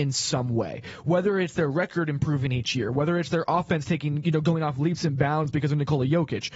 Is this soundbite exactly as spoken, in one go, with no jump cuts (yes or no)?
yes